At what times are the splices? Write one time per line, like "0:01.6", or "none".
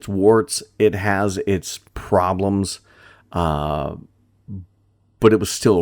0:01.9